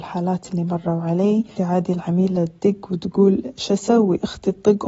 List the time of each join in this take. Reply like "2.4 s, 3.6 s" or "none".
1.6 s